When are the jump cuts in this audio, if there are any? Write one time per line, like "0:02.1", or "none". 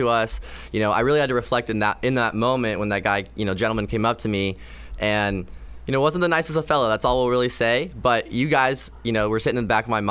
none